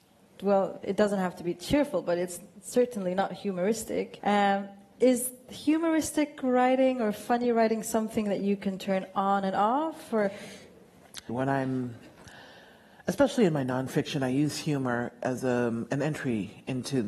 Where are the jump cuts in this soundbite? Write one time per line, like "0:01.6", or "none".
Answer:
0:04.2
0:11.3